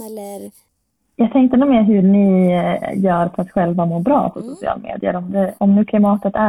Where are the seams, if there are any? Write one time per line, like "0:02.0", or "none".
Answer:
0:05.6